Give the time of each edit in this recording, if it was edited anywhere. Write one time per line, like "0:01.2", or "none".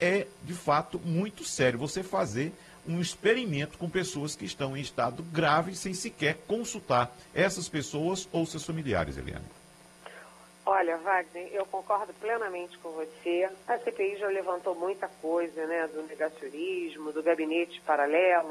0:13.6